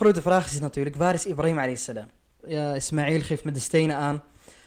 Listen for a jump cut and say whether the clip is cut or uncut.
cut